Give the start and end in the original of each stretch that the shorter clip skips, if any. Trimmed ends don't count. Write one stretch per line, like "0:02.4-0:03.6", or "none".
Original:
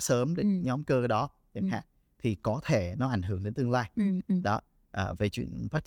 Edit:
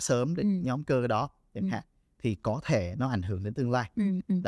none